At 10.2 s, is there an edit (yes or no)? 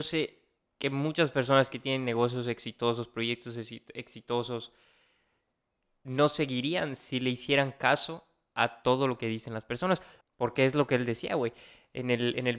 yes